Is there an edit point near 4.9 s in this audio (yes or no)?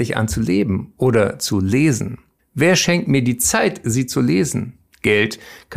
no